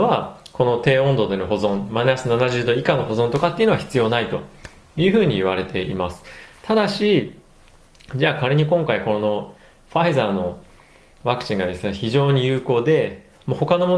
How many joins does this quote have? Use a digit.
0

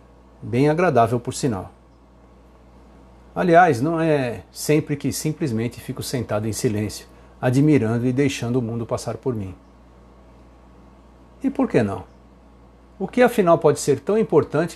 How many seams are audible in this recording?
0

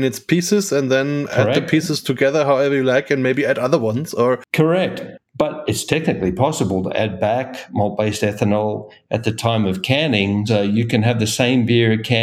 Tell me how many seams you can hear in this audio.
2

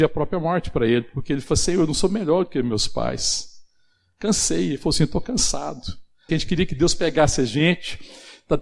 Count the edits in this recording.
1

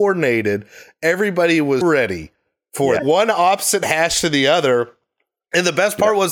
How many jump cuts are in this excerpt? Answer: 2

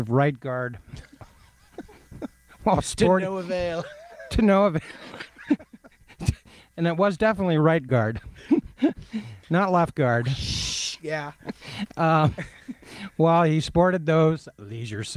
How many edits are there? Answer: 0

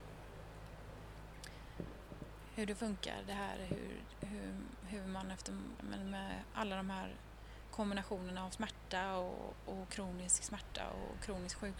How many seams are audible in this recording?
1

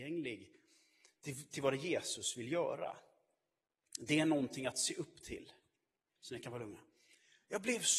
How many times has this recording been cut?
1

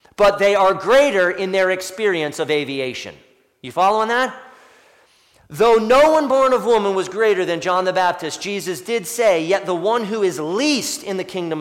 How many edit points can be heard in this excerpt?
0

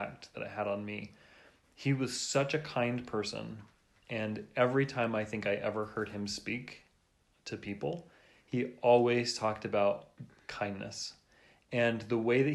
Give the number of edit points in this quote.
0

